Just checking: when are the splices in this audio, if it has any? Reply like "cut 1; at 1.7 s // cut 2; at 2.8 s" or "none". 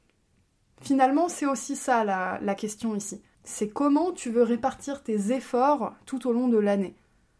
cut 1; at 3.3 s